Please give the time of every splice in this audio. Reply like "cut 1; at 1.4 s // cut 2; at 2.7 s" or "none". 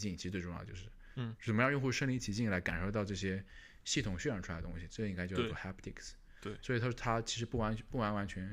none